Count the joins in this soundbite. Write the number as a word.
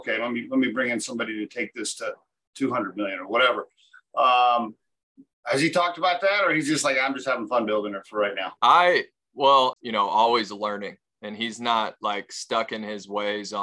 two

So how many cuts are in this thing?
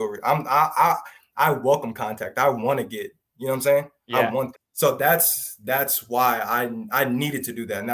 one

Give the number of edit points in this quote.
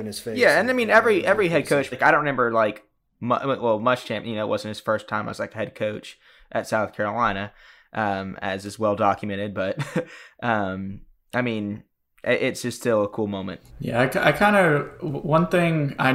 two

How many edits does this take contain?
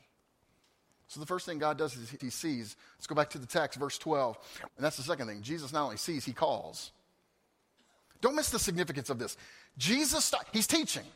three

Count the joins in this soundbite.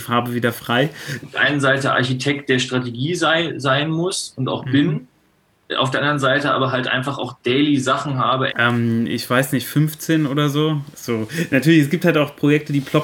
three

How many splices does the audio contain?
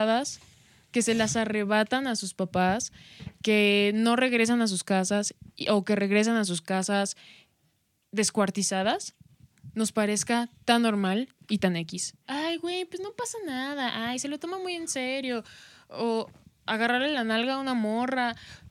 one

